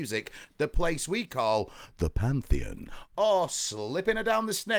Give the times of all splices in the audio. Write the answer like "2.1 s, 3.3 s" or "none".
none